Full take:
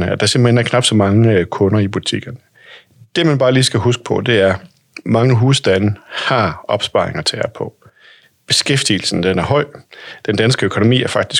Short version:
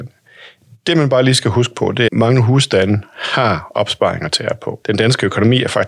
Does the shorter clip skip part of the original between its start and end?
yes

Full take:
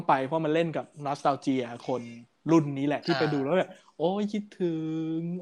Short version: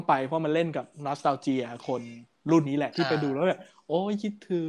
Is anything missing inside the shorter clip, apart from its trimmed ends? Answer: yes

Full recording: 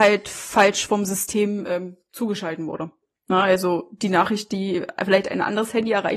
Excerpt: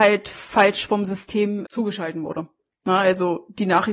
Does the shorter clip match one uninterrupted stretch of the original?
no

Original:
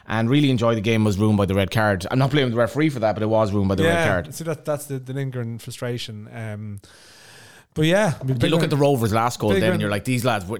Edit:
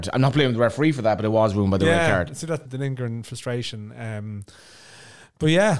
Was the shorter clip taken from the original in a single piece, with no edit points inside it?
no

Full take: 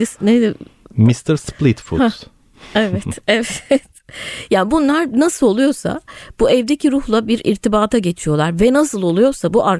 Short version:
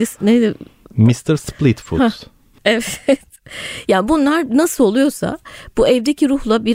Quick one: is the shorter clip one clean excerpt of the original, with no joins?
no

